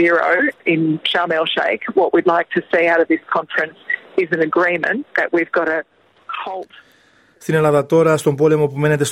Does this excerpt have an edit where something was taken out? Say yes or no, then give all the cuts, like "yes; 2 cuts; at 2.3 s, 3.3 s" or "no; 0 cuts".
no; 0 cuts